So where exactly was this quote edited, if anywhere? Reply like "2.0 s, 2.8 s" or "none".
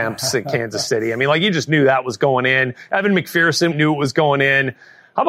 3.7 s